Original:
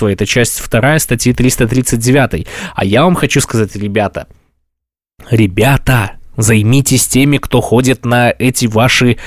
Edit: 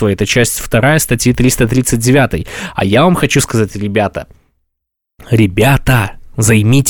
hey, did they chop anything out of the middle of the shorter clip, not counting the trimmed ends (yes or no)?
no